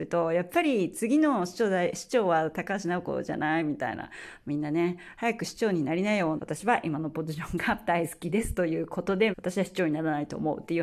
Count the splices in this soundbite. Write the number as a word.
two